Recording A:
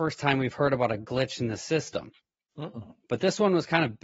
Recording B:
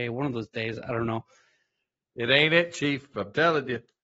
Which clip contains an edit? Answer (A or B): B